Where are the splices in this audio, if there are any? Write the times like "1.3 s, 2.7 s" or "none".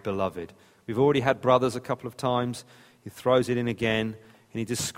none